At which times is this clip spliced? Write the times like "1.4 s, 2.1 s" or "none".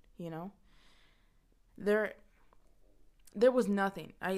1.7 s, 3.3 s